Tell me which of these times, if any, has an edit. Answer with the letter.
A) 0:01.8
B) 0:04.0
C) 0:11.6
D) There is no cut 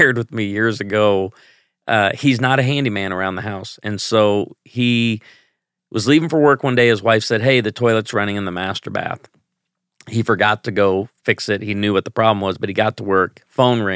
D